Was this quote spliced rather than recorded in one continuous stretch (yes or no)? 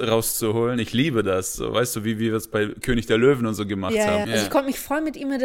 yes